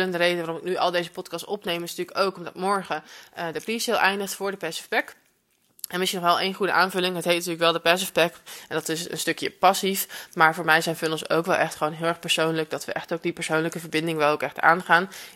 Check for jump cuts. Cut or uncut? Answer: uncut